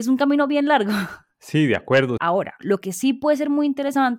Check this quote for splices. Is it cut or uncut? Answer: cut